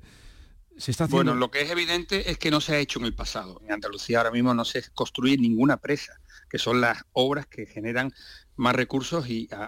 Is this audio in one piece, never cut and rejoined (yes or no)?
no